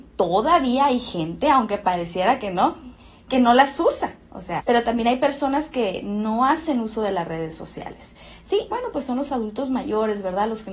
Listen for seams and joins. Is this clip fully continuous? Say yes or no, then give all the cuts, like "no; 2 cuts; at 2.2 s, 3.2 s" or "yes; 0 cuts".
no; 2 cuts; at 4.6 s, 8.7 s